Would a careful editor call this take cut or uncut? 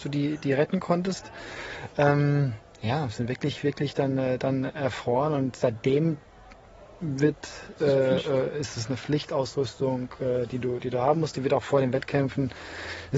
uncut